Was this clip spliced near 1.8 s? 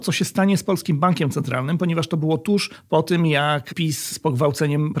no; 0 cuts

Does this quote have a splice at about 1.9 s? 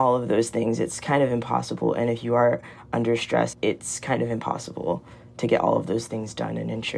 no; 1 cut; at 3.5 s

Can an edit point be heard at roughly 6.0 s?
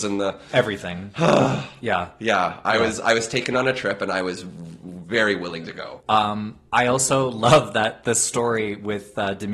yes; 1 cut; at 6.0 s

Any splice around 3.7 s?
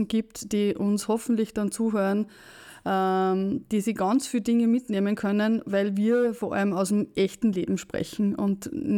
no; 0 cuts

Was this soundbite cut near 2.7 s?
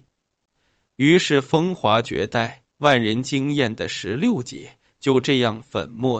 yes; 1 cut; at 2.7 s

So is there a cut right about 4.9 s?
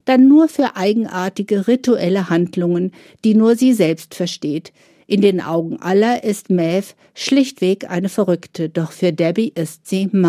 no; 0 cuts

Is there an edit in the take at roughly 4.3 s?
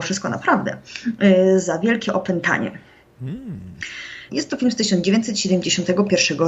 yes; 1 cut; at 4.3 s

